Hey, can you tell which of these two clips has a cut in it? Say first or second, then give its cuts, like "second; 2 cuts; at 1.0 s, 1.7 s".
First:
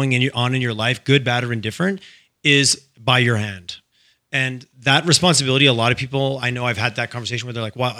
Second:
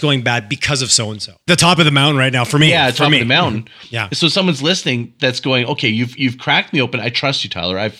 second; 1 cut; at 1.5 s